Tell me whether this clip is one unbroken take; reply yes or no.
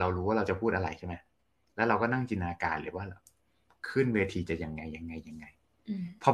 yes